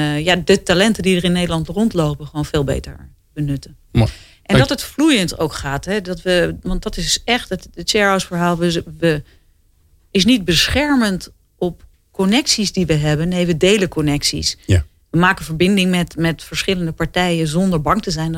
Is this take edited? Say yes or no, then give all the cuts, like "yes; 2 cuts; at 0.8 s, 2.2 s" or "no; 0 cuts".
no; 0 cuts